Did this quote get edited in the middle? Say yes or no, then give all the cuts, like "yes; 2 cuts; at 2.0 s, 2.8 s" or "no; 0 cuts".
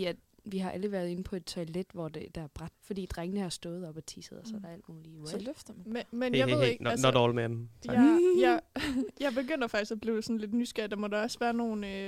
yes; 1 cut; at 2.7 s